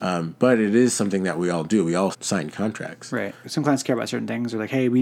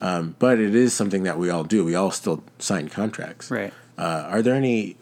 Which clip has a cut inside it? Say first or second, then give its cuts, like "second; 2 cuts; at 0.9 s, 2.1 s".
first; 2 cuts; at 2.1 s, 3.4 s